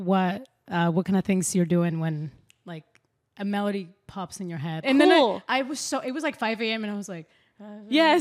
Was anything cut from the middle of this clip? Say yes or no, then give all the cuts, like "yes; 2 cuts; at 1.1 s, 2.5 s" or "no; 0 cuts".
yes; 1 cut; at 4.8 s